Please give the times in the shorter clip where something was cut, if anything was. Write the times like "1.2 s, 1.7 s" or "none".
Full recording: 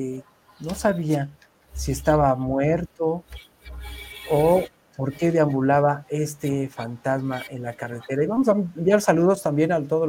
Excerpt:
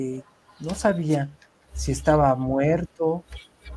none